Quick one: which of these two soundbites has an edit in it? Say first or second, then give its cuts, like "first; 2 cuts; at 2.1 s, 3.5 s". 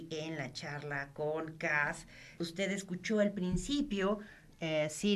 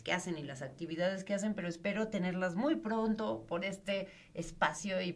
first; 1 cut; at 2.4 s